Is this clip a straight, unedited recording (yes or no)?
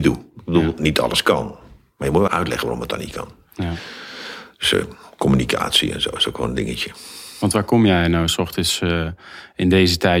no